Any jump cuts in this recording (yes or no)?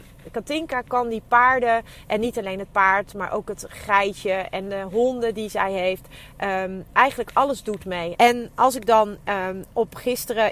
yes